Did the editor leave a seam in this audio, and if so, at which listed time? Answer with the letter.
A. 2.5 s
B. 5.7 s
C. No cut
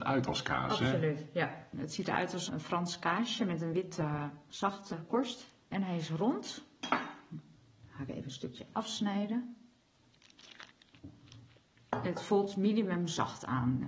A